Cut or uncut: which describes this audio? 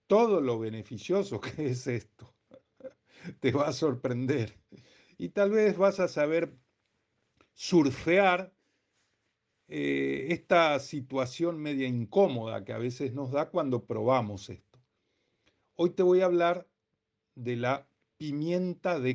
uncut